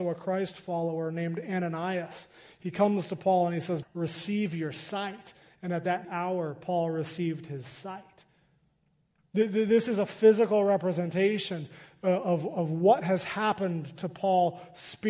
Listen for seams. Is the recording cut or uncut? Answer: cut